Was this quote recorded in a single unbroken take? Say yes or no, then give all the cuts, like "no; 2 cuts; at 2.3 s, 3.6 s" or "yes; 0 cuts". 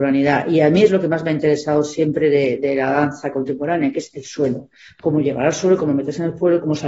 yes; 0 cuts